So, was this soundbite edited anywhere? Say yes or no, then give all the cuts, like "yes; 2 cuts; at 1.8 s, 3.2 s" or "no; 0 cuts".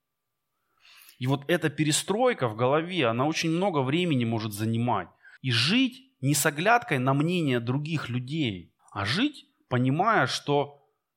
yes; 2 cuts; at 5.4 s, 8.8 s